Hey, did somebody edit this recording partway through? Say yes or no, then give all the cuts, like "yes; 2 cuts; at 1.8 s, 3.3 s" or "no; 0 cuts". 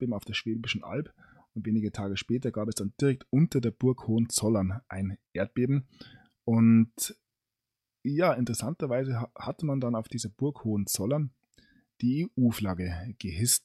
no; 0 cuts